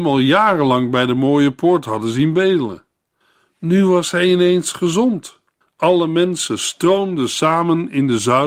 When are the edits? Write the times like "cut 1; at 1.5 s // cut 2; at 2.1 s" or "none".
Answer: cut 1; at 5.6 s